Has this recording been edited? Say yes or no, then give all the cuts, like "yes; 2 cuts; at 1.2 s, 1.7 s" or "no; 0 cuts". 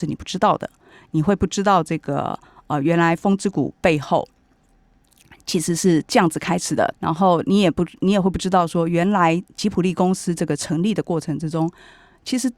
yes; 1 cut; at 6.9 s